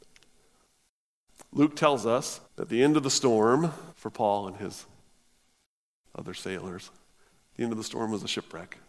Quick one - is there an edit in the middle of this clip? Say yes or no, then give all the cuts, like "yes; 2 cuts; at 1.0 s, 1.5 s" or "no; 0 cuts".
yes; 2 cuts; at 2.4 s, 3.9 s